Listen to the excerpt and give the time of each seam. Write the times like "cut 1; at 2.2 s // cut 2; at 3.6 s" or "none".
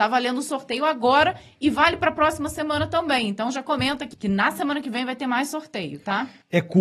cut 1; at 4.1 s